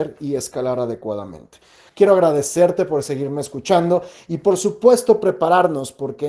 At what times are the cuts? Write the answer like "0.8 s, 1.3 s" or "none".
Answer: 1.9 s

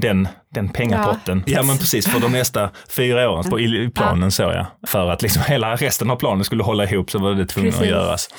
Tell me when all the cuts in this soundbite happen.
1.5 s, 3.4 s, 4.9 s

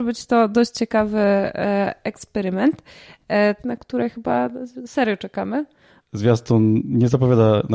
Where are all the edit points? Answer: 3.6 s, 6.0 s

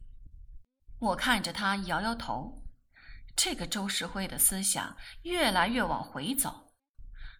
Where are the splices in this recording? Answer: none

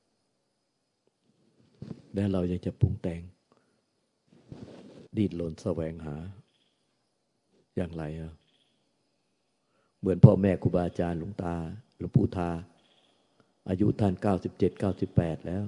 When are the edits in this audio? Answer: 5.1 s

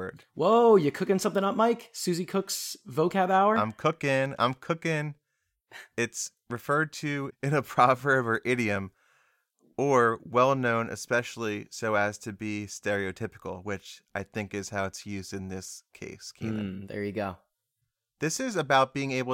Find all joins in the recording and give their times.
none

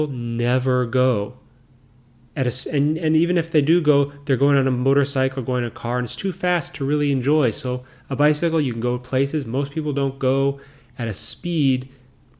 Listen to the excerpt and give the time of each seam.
none

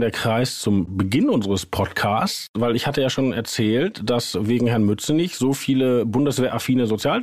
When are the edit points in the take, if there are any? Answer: none

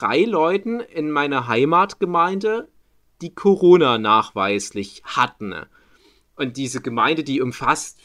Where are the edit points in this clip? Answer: none

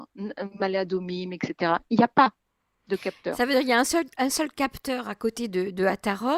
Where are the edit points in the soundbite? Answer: none

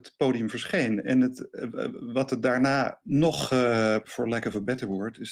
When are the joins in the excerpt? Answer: 3.0 s, 4.0 s

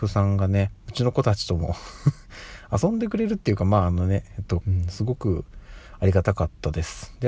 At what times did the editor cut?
4.6 s

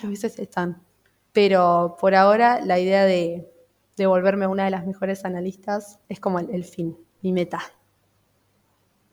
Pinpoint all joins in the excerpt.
1.3 s, 6.0 s

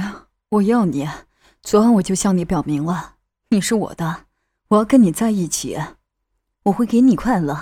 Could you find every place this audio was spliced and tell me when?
none

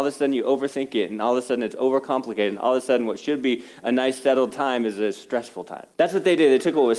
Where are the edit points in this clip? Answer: 5.9 s

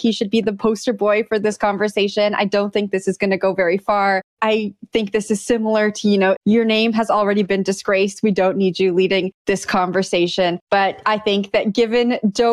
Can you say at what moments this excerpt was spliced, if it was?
4.3 s, 6.4 s

